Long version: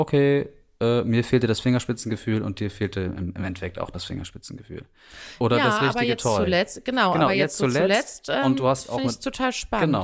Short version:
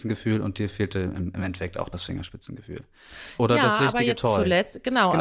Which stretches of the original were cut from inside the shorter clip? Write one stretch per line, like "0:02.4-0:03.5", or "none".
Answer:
none